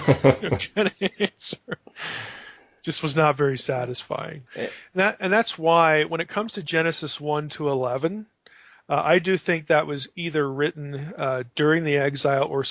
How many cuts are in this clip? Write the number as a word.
one